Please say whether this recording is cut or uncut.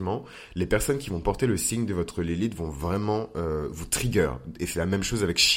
uncut